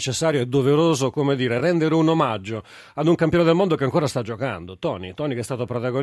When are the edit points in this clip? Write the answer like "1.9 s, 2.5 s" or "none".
none